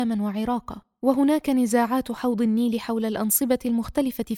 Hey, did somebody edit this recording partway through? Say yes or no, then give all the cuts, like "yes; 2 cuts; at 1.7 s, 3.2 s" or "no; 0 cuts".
no; 0 cuts